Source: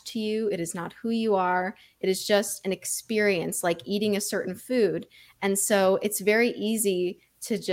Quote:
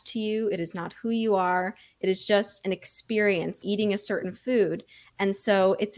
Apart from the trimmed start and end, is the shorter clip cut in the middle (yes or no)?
yes